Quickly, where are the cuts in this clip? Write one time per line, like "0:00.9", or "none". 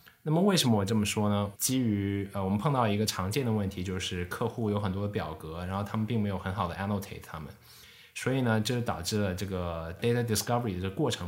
0:01.5